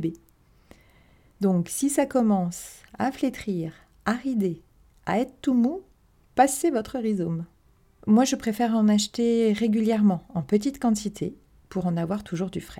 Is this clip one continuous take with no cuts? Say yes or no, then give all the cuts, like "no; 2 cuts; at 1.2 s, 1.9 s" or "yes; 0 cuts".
no; 1 cut; at 8.0 s